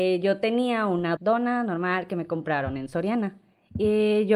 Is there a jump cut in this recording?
yes; 1 cut; at 1.2 s

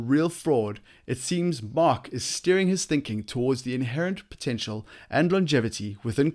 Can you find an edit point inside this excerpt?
no; 0 cuts

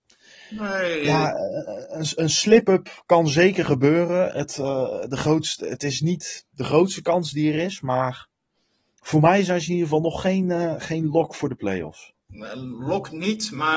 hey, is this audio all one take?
yes; 0 cuts

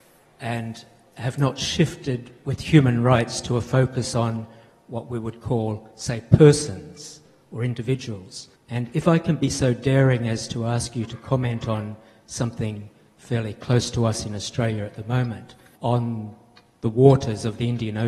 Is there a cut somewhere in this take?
yes; 2 cuts; at 8.6 s, 15.8 s

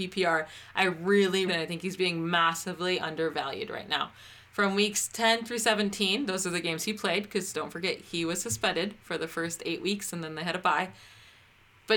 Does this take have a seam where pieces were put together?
yes; 1 cut; at 1.5 s

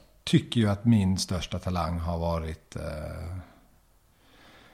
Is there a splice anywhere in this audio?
no; 0 cuts

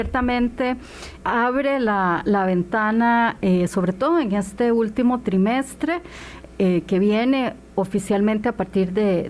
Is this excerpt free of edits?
no; 1 cut; at 1.2 s

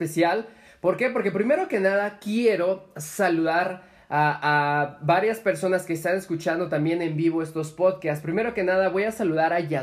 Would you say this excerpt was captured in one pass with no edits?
yes; 0 cuts

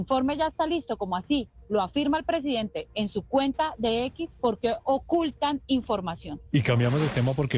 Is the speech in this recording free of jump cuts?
no; 1 cut; at 6.5 s

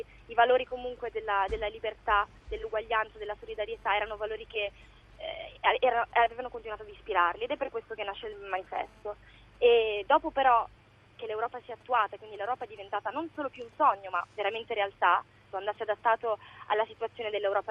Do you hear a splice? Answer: yes; 2 cuts; at 11.2 s, 15.5 s

